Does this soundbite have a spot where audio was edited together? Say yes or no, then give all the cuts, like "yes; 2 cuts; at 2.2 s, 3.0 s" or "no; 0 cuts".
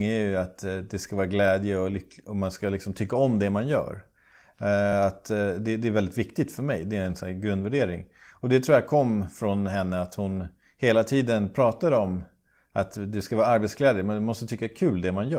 no; 0 cuts